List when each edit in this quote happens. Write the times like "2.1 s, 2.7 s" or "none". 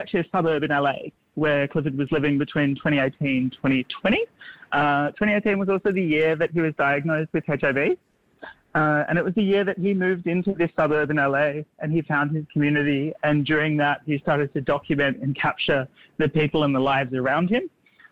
none